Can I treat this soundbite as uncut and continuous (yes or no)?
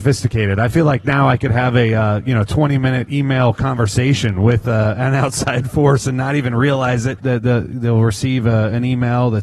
no